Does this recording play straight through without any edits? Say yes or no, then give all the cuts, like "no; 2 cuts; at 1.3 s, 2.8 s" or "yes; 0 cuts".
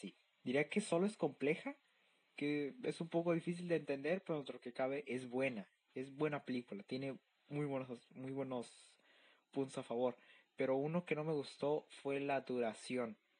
yes; 0 cuts